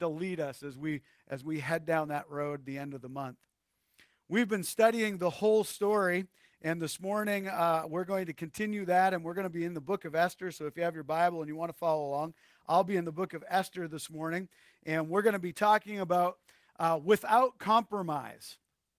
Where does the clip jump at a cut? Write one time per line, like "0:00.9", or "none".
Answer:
none